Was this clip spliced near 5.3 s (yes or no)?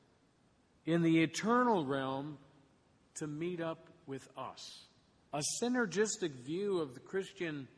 yes